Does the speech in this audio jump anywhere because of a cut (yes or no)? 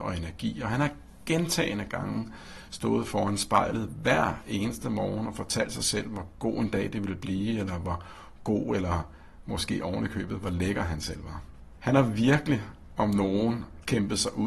no